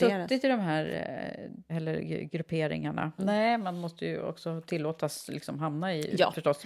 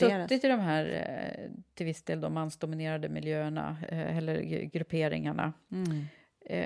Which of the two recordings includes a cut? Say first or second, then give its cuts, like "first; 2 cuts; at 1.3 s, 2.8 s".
first; 2 cuts; at 1.7 s, 3.2 s